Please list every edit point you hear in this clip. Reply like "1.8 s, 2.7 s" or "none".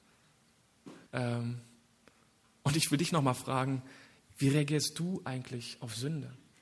1.1 s